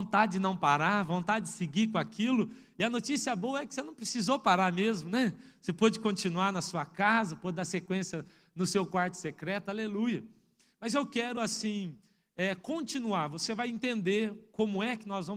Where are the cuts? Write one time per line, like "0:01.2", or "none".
none